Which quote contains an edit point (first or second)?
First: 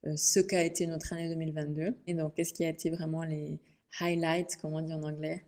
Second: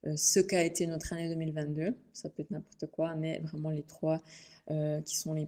first